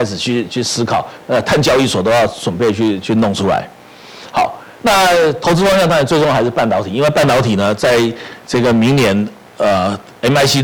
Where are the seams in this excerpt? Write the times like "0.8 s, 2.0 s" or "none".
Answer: 1.2 s